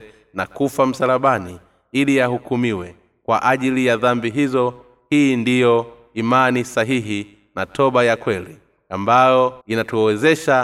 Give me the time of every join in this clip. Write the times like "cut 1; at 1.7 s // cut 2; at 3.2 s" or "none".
cut 1; at 9.6 s